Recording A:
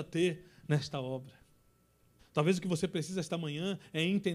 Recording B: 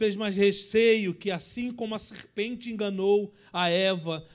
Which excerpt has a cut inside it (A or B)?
A